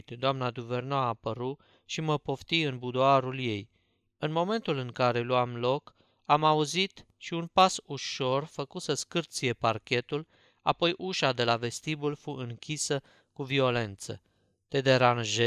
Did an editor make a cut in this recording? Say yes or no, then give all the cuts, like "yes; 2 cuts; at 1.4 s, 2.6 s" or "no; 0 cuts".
yes; 1 cut; at 7.1 s